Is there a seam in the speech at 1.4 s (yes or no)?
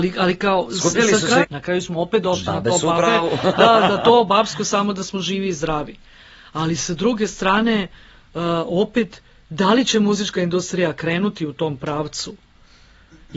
yes